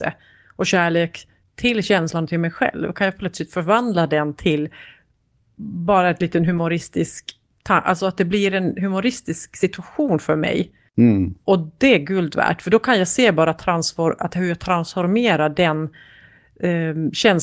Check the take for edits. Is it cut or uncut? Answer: uncut